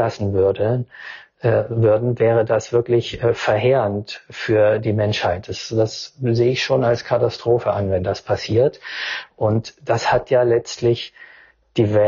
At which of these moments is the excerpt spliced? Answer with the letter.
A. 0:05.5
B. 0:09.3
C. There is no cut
C